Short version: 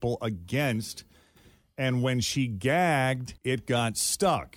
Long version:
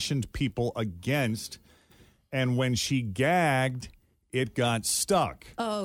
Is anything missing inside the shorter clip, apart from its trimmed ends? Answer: yes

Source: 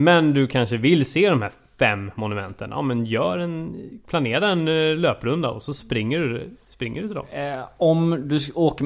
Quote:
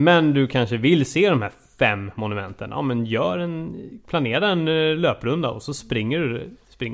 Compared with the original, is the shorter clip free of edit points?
yes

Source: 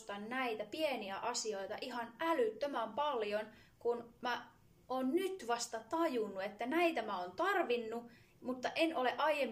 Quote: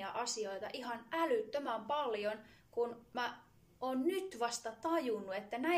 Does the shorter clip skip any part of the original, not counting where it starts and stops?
no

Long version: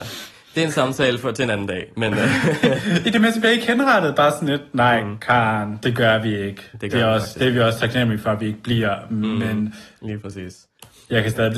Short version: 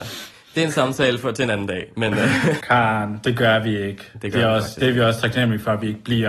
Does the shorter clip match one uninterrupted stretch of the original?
no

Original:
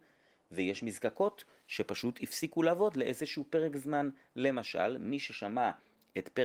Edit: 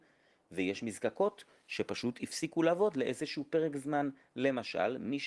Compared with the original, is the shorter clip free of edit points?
yes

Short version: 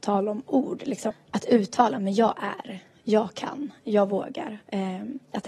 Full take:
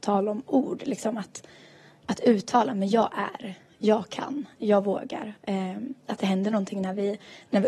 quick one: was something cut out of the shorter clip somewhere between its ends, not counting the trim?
yes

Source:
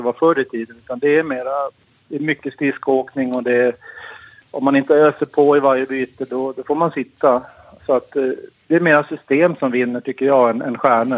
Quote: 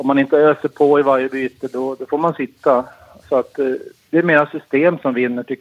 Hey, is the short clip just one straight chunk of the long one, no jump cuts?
yes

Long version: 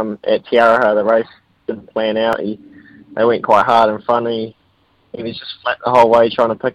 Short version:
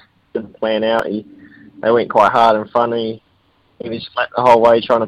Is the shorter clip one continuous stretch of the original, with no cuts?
no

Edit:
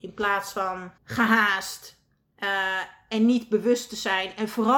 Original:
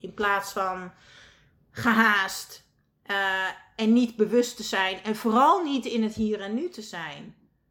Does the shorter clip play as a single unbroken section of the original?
no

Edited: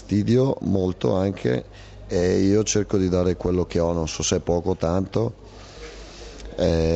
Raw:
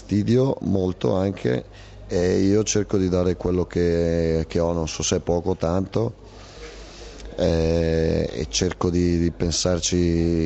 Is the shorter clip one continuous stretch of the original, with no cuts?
no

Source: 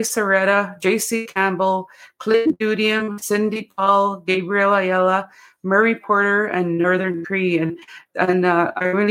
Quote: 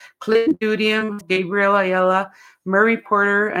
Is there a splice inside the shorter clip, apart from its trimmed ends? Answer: yes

